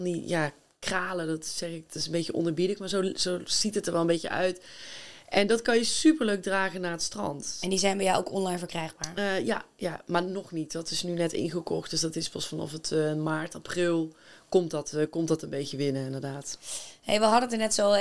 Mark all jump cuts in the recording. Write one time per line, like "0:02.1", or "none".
none